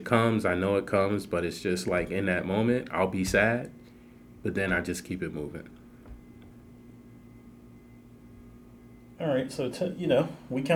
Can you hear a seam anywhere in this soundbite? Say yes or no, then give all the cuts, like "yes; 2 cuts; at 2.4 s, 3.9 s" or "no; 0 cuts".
no; 0 cuts